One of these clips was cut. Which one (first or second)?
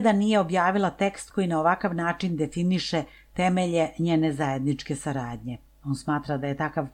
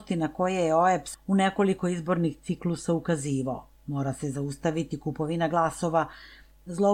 second